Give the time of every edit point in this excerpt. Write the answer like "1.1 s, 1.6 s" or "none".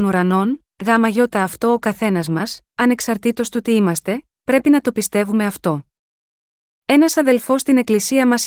none